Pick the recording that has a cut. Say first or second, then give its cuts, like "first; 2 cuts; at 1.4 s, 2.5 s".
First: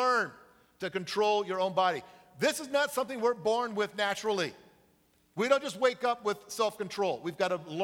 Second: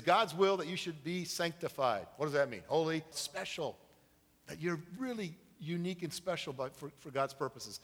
second; 1 cut; at 3.1 s